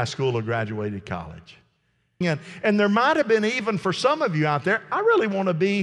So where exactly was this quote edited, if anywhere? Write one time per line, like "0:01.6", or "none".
0:02.2